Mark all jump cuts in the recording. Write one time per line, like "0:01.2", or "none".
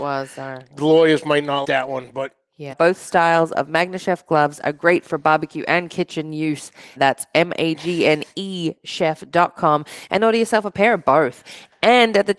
0:01.6
0:02.7
0:07.0